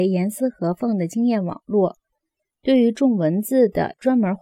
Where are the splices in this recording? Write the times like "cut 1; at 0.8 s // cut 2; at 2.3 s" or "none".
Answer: none